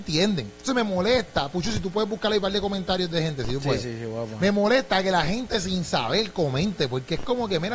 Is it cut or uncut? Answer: uncut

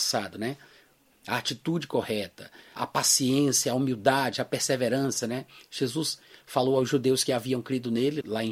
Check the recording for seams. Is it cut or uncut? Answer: cut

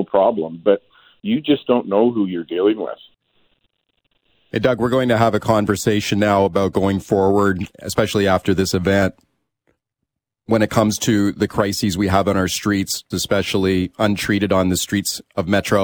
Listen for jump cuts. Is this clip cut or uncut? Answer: cut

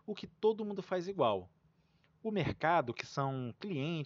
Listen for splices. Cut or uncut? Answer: uncut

